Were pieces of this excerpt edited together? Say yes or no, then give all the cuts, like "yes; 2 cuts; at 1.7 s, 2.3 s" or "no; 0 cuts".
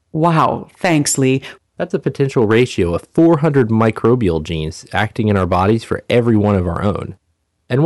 yes; 1 cut; at 1.6 s